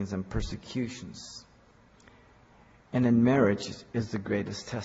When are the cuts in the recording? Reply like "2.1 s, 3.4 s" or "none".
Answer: none